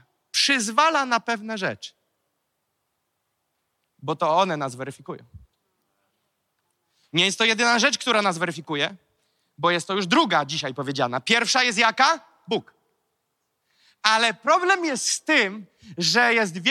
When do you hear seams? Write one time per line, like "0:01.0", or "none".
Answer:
none